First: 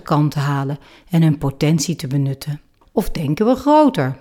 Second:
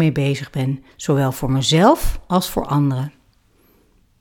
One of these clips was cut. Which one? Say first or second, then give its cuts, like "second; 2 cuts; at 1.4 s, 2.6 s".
first; 1 cut; at 2.8 s